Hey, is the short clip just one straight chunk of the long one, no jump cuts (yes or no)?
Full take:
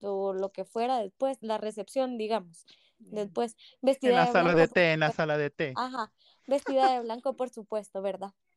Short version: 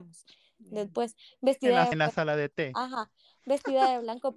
no